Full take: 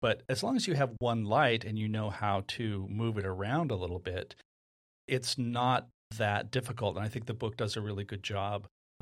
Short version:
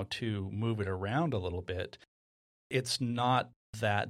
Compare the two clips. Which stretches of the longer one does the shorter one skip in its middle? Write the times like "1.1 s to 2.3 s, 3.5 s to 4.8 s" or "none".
none